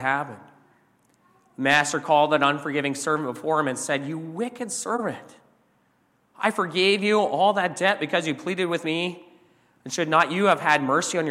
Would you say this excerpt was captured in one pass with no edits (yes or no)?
yes